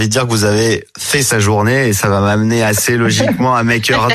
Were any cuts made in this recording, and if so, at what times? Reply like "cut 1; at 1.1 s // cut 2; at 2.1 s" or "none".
none